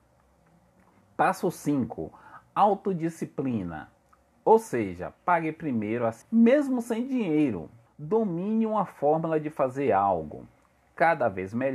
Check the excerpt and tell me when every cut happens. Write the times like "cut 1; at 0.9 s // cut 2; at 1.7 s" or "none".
cut 1; at 6.2 s // cut 2; at 7.9 s